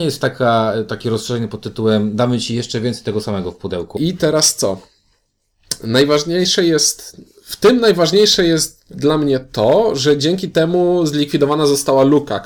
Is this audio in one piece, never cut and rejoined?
no; 1 cut; at 4.0 s

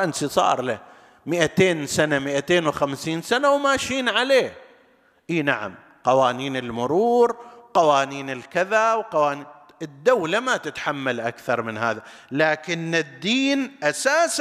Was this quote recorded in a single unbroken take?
yes; 0 cuts

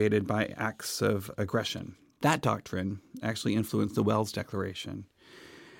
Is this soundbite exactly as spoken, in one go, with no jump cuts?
yes; 0 cuts

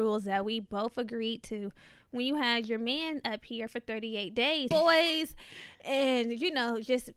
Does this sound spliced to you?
yes; 1 cut; at 4.7 s

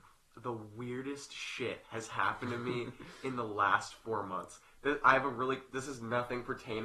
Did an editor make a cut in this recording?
no; 0 cuts

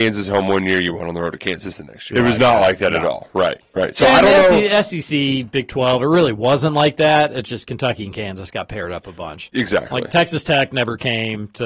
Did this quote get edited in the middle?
yes; 1 cut; at 2.1 s

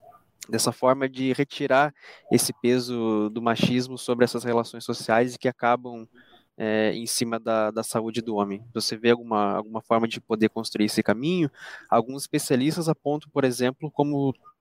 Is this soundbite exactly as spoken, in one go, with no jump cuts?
yes; 0 cuts

